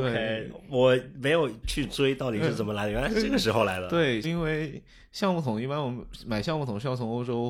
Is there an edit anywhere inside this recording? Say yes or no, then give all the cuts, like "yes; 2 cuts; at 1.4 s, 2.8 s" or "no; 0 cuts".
yes; 2 cuts; at 1.6 s, 4.2 s